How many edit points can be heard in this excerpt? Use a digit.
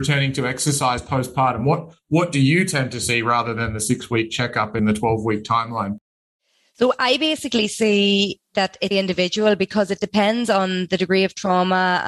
2